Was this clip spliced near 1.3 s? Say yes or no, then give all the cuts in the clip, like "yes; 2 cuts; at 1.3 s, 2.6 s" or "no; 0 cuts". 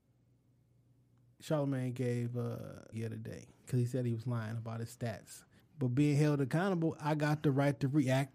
no; 2 cuts; at 2.9 s, 5.6 s